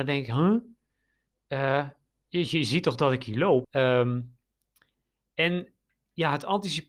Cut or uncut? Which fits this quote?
cut